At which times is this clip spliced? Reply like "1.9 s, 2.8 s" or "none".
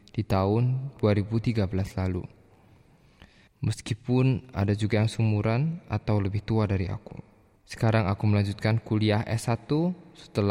3.5 s, 7.6 s